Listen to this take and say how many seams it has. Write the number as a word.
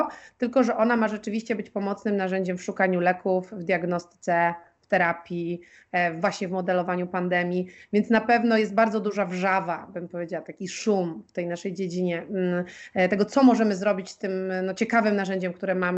zero